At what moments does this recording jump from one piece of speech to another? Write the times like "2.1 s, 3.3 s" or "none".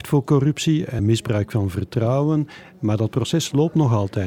1.0 s